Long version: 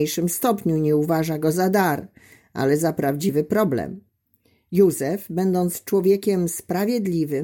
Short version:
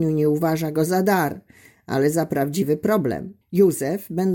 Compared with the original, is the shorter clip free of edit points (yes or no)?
no